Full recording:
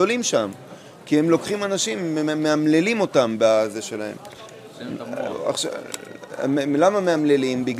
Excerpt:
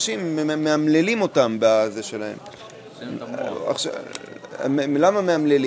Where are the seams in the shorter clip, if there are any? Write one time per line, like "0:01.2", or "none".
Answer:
none